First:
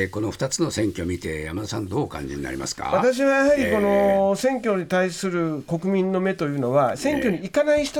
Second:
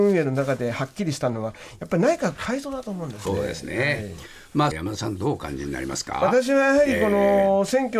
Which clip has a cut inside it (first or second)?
second